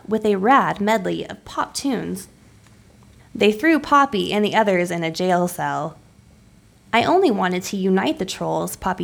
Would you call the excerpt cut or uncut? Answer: cut